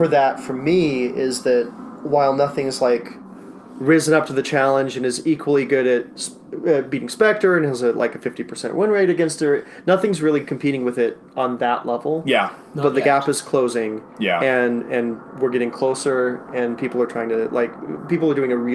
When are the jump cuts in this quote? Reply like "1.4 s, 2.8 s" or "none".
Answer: none